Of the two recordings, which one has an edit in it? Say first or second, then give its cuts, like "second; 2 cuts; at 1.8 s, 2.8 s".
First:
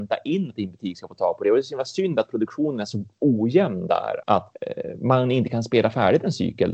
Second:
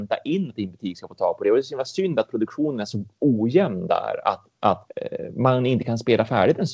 first; 1 cut; at 4.2 s